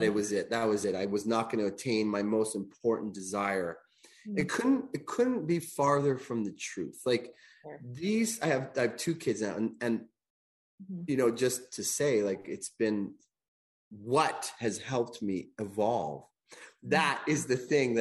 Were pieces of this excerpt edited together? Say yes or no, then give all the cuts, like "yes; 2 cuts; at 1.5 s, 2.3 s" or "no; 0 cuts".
no; 0 cuts